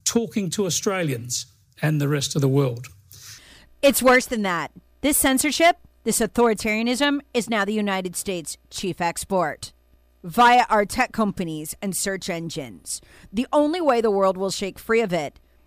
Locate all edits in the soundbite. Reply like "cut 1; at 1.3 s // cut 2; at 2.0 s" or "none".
none